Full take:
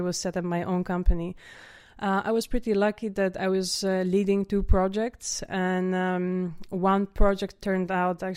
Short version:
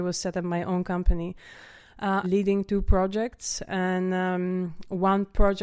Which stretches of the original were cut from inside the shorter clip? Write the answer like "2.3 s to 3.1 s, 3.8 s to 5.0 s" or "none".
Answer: 2.2 s to 4.0 s